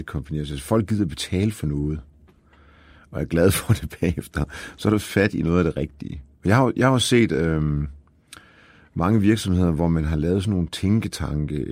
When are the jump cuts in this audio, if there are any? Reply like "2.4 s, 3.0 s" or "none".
none